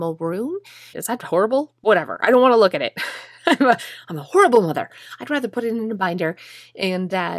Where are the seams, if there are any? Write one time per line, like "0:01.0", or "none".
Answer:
0:00.9